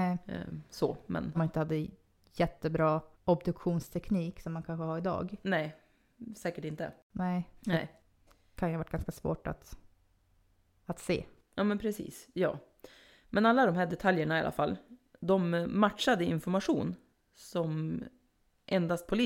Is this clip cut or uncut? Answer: cut